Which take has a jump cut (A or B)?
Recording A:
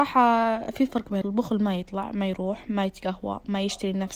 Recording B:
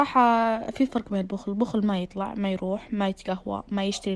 A